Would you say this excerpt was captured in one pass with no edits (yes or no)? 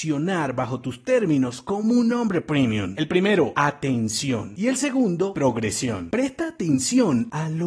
no